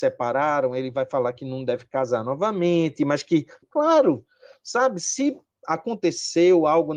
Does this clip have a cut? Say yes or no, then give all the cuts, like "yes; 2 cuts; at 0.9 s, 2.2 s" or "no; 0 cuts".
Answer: yes; 1 cut; at 3.6 s